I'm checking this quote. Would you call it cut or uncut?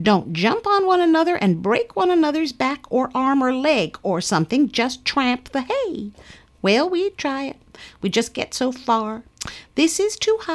uncut